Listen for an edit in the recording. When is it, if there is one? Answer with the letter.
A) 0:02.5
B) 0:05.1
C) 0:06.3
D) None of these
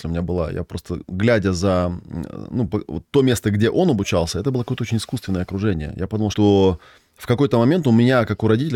C